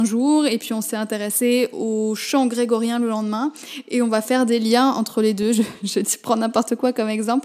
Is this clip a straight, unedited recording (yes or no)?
yes